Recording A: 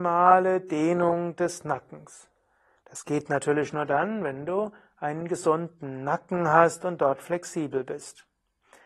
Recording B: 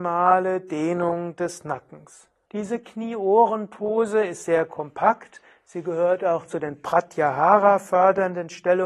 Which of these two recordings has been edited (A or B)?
B